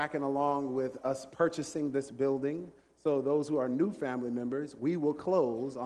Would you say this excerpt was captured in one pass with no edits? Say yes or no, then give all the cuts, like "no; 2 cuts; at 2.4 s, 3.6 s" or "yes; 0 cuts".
no; 1 cut; at 1.0 s